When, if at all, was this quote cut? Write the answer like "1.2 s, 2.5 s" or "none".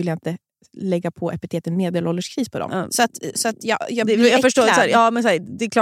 2.7 s